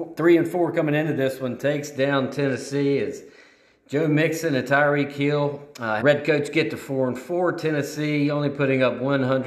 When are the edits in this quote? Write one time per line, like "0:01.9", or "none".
0:06.0